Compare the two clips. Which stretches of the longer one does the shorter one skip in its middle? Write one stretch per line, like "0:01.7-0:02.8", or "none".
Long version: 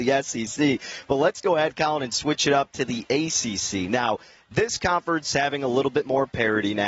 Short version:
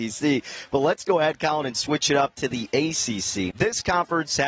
0:03.9-0:04.5